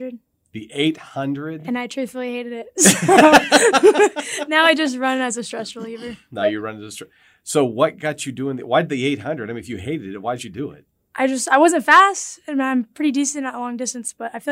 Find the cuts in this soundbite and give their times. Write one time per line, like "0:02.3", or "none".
none